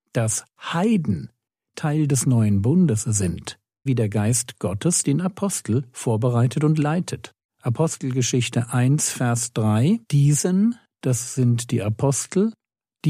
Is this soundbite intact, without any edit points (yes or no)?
no